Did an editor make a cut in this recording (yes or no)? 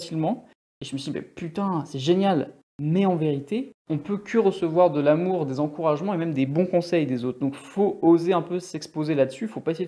yes